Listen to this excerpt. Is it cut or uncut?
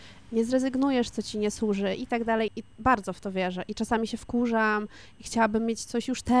cut